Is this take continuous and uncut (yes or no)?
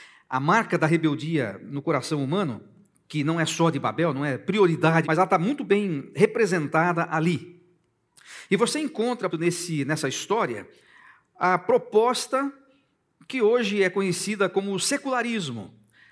no